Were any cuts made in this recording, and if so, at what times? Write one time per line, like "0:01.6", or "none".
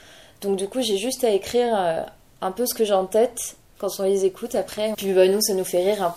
0:03.8
0:04.9